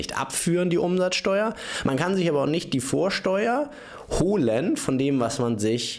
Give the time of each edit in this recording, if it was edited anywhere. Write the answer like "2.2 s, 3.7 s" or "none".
none